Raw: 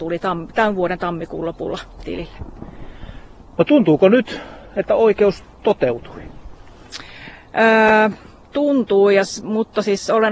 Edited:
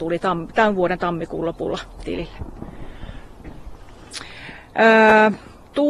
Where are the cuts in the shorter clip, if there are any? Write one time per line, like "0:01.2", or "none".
0:03.4